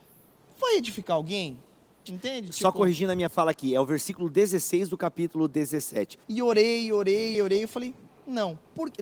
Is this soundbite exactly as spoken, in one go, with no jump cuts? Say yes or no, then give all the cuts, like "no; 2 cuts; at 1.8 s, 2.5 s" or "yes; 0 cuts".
no; 3 cuts; at 2.1 s, 6.2 s, 7.3 s